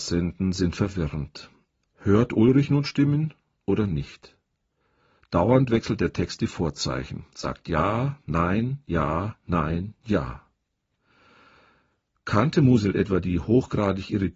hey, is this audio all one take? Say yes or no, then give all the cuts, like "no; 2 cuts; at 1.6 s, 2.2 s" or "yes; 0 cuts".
yes; 0 cuts